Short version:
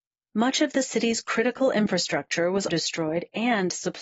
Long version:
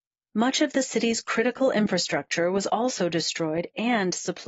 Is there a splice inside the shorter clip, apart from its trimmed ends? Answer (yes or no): yes